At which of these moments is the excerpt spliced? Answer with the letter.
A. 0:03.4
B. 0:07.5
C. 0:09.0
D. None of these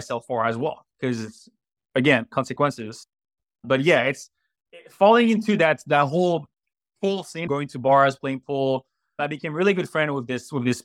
B